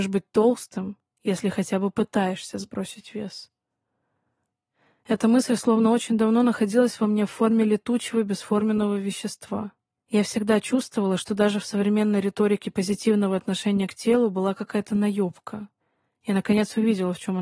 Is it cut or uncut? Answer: cut